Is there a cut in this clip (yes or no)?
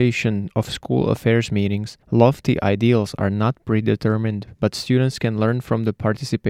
no